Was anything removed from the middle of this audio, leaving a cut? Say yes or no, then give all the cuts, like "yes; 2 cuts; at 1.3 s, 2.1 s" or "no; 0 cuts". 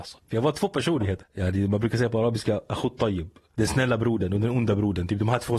yes; 2 cuts; at 1.2 s, 3.5 s